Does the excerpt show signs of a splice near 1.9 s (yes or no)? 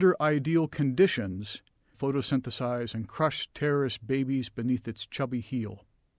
yes